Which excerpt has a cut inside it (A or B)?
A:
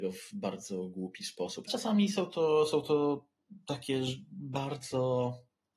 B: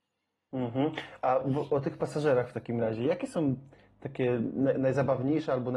A